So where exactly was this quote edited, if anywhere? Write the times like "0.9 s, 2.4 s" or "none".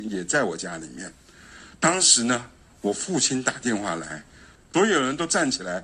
4.6 s